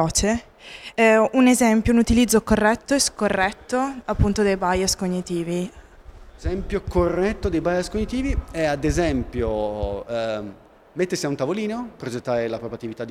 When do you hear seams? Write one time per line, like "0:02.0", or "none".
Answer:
none